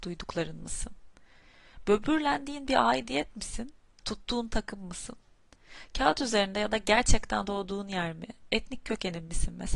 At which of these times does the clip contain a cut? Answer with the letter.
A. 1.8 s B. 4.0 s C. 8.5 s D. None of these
B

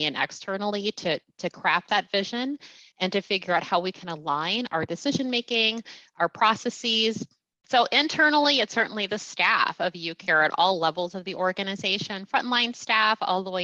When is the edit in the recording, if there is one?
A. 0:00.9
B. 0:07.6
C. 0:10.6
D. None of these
B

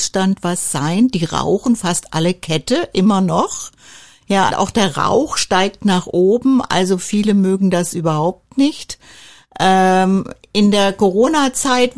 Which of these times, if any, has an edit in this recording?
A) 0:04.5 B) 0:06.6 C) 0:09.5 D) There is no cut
A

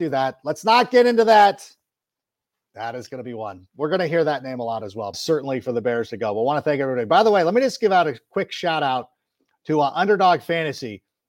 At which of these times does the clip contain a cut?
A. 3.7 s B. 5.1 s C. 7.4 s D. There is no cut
B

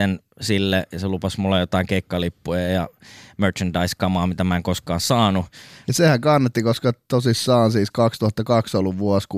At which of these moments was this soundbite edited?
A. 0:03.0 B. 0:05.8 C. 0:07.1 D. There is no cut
B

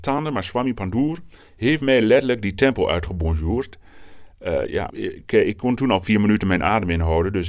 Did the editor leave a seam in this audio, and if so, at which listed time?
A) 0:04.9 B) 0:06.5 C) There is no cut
A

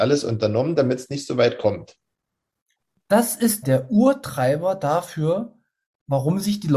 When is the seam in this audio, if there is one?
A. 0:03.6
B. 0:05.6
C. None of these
A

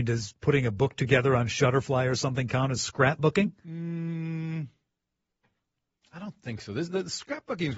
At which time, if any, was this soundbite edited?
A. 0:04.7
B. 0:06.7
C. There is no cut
C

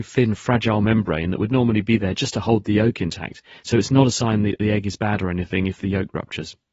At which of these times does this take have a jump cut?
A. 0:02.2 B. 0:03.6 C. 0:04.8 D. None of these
D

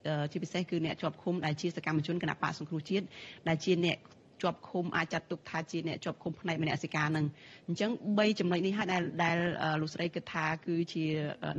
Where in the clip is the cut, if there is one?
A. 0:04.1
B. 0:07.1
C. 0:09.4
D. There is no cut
D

